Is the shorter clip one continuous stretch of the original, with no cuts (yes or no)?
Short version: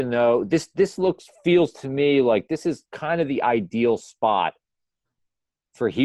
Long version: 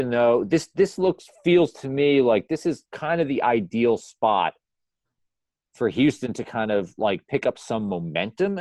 yes